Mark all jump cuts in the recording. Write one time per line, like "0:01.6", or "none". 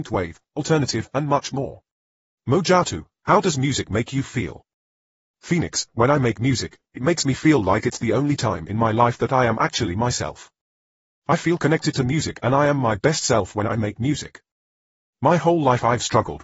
0:02.4